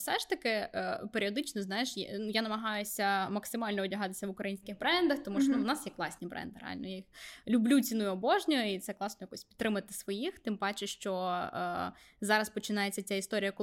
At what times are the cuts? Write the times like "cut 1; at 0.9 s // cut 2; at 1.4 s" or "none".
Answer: none